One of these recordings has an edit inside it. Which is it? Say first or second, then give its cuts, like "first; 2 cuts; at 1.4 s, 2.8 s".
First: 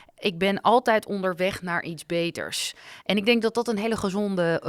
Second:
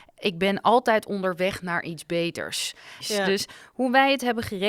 second; 1 cut; at 3.0 s